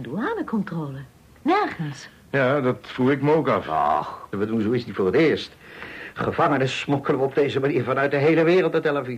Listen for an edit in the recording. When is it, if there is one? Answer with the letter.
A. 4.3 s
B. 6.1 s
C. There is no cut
A